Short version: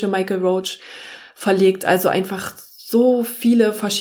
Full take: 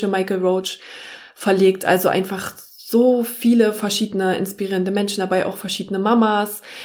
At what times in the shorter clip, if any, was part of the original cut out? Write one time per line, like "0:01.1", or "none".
none